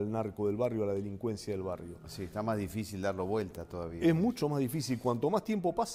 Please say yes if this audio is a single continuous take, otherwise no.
yes